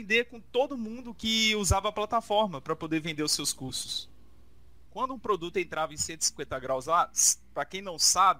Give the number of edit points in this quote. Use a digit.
1